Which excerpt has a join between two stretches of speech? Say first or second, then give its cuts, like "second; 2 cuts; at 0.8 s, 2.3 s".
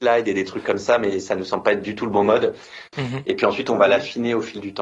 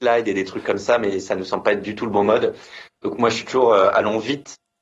first; 1 cut; at 2.9 s